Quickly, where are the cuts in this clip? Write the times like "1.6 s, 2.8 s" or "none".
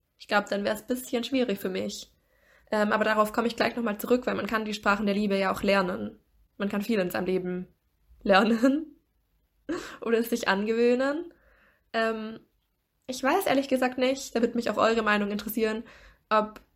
none